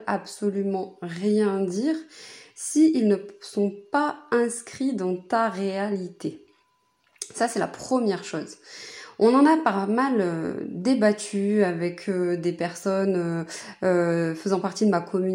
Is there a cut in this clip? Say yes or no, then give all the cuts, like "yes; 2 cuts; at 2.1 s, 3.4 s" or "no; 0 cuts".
no; 0 cuts